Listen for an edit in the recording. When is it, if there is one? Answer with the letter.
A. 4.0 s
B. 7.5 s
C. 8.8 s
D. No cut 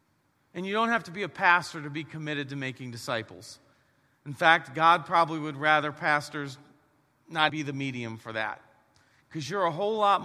B